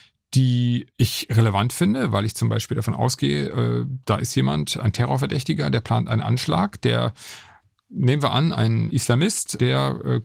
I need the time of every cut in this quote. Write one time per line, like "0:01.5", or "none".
none